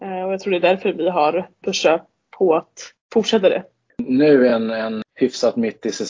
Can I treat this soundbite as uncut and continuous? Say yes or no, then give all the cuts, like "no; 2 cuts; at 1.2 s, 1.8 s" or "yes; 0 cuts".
yes; 0 cuts